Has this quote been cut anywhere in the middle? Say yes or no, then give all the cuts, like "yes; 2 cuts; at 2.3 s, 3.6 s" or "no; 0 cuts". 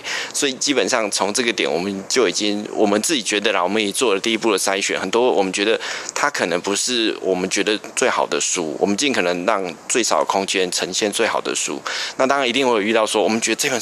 no; 0 cuts